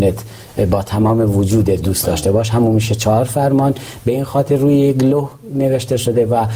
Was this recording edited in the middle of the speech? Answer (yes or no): no